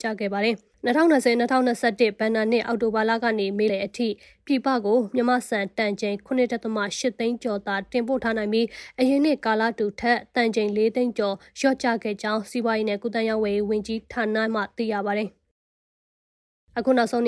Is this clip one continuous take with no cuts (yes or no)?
no